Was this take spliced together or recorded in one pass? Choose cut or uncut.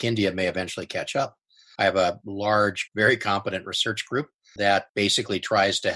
cut